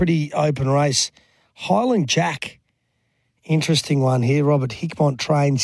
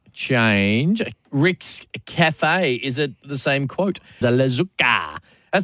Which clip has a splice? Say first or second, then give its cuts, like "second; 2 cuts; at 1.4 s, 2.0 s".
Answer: second; 2 cuts; at 1.1 s, 4.2 s